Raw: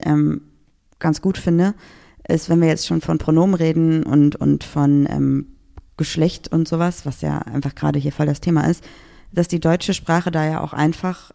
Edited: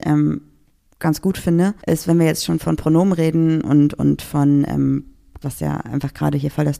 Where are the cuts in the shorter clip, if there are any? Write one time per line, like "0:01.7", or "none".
0:01.8
0:05.4